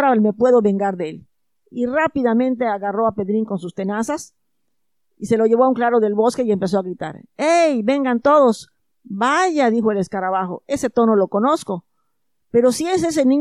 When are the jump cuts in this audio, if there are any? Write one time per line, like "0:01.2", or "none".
0:08.9